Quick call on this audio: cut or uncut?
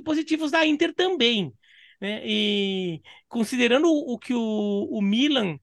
uncut